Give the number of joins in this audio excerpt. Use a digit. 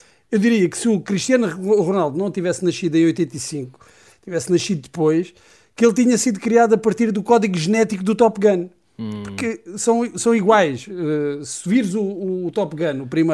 0